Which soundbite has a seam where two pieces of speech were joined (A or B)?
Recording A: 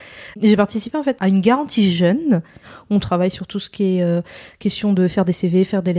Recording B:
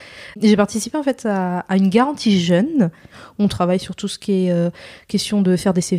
A